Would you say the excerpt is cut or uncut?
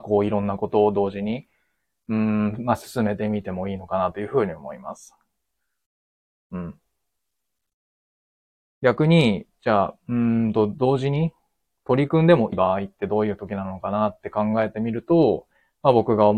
cut